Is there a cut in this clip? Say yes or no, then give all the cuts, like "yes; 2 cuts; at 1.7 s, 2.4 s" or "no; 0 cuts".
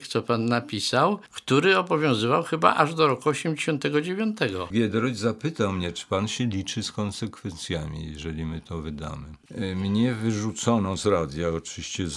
yes; 1 cut; at 4.7 s